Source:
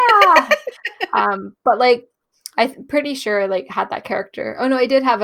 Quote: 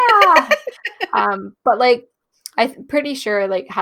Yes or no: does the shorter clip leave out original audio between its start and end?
no